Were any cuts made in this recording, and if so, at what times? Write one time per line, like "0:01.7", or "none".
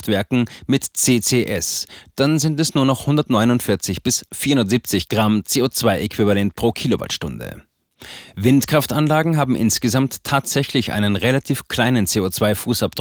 none